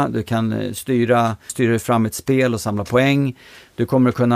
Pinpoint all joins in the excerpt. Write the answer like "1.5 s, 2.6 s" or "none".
1.5 s